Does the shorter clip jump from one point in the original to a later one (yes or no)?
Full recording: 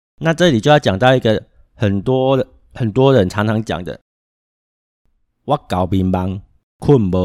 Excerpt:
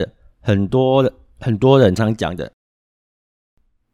yes